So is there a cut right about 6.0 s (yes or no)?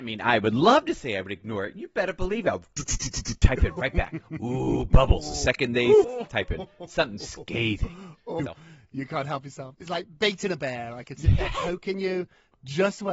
yes